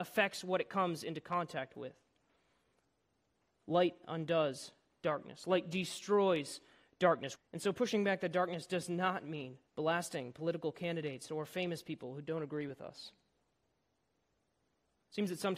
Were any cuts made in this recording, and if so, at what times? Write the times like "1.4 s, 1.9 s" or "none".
7.4 s, 9.7 s